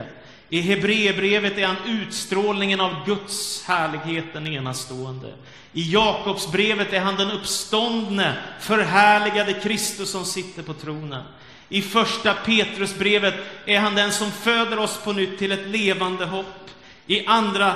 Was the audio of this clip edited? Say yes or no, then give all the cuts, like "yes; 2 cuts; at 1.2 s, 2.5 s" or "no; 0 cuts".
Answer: no; 0 cuts